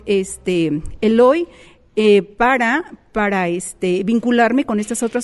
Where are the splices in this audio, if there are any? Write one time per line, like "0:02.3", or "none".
none